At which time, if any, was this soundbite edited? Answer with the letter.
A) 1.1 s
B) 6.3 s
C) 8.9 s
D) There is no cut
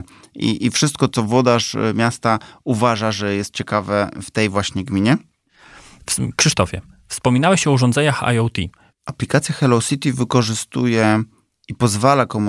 C